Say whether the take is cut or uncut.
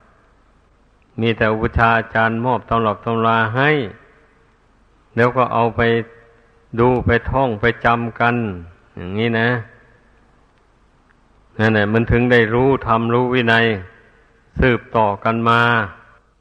uncut